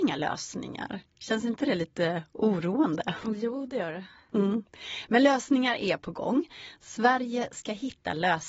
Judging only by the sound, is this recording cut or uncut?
uncut